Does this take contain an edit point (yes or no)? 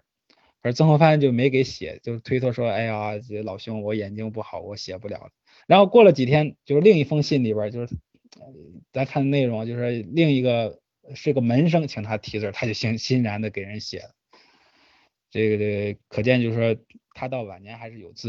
yes